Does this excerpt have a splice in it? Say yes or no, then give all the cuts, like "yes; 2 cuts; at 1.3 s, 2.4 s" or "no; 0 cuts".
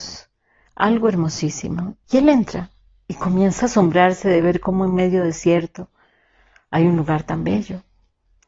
yes; 1 cut; at 2.0 s